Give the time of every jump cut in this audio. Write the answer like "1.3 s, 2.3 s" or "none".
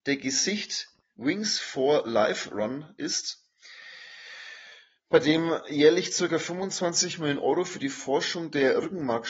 1.1 s